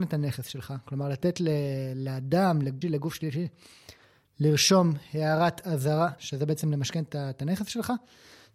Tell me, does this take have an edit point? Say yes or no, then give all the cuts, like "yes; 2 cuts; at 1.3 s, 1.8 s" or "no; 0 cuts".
yes; 2 cuts; at 2.8 s, 6.2 s